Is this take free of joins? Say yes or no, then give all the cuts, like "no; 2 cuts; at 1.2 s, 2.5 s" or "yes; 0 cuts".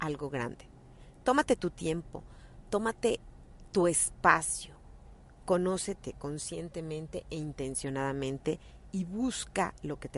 yes; 0 cuts